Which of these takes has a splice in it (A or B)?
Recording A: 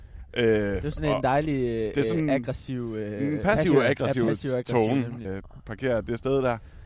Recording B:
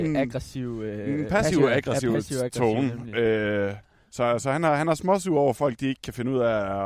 A